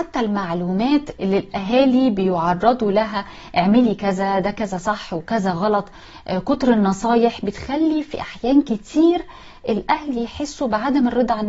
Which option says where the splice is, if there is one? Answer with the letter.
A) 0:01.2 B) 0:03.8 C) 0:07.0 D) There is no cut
A